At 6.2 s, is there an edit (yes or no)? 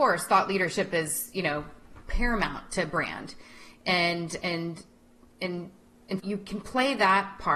yes